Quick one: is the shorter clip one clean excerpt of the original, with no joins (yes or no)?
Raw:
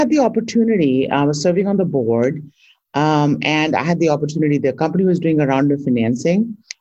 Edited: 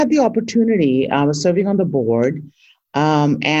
yes